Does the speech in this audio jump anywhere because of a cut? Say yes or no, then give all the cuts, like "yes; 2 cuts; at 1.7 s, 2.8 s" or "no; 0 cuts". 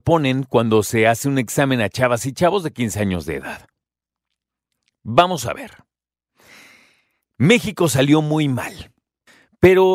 no; 0 cuts